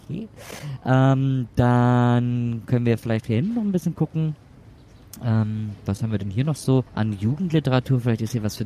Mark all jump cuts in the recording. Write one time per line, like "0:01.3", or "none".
0:06.9